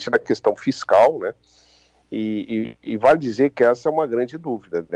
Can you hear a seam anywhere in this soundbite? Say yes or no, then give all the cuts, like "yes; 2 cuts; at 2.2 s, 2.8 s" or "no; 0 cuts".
no; 0 cuts